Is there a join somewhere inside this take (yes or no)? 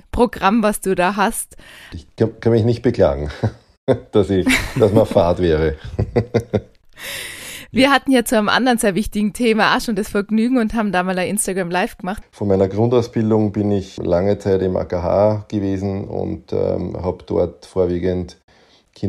yes